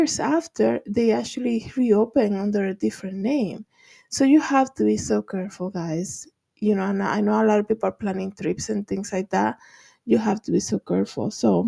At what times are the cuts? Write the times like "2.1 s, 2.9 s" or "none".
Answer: none